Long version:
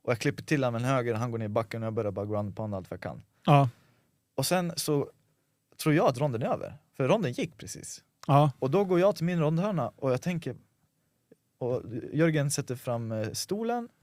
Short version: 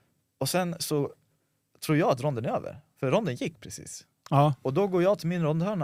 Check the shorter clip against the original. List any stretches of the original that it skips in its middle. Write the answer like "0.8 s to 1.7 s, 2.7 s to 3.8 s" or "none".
none